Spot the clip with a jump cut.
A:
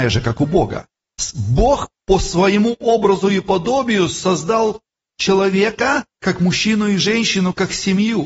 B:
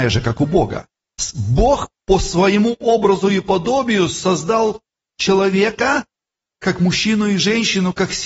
A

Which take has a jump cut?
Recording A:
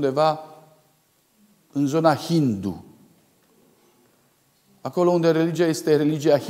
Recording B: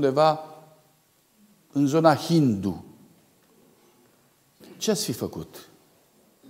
B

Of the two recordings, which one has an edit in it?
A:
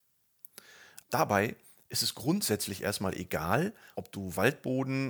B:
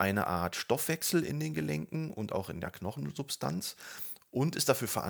A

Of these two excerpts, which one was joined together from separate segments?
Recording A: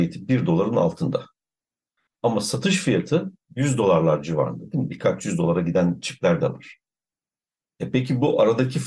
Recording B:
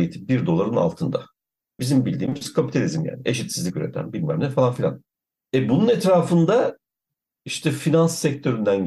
B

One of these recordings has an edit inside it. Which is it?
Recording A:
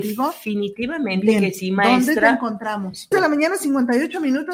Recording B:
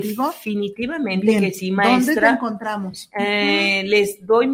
A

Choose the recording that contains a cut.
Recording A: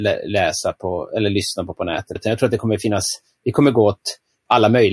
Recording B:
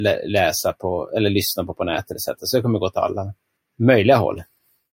A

